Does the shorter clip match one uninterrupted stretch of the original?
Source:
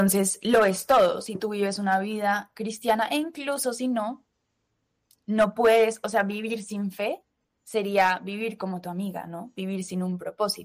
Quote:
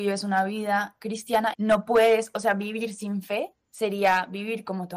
no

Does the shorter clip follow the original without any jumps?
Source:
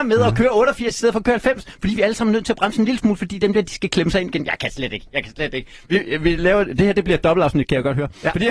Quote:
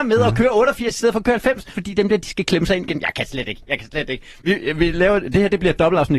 no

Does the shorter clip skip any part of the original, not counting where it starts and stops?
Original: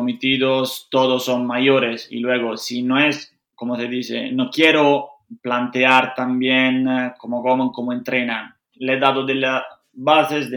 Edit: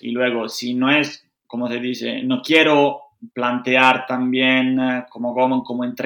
no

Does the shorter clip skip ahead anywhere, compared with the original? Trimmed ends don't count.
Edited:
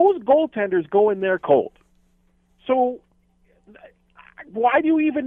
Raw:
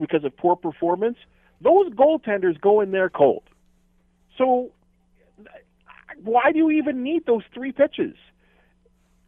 no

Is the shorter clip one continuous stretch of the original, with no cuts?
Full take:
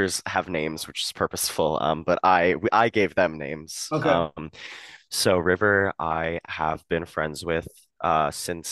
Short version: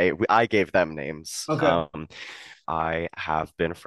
no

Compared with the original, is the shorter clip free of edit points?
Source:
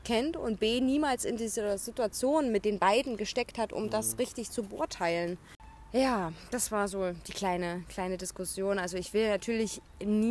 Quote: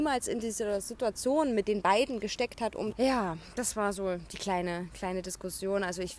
no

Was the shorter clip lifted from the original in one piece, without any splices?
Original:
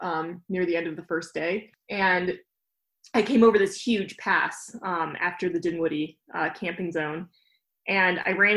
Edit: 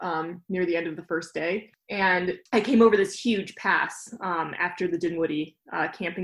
no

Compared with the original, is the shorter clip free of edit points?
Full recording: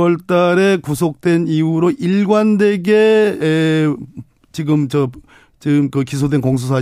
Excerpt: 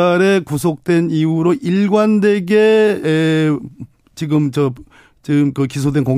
yes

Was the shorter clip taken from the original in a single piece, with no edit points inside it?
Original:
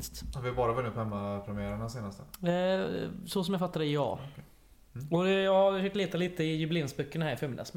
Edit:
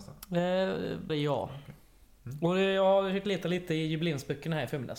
no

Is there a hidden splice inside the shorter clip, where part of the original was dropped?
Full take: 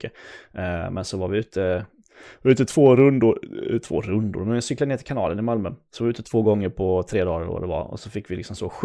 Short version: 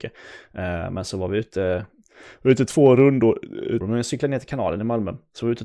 yes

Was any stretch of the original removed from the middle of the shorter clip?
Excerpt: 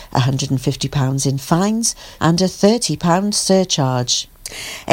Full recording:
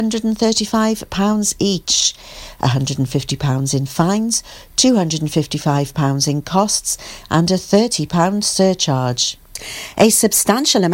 yes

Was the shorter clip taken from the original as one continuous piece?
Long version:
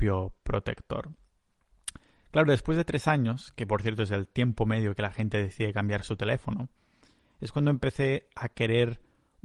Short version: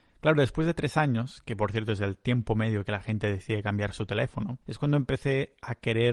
no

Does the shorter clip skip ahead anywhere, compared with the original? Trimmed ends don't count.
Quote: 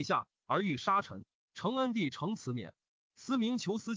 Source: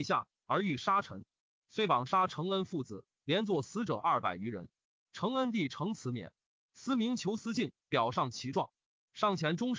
yes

